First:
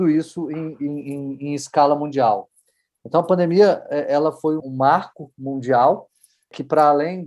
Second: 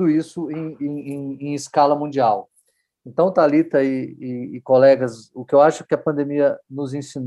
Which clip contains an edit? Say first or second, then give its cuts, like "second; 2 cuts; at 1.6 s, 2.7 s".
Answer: first; 2 cuts; at 2.9 s, 4.6 s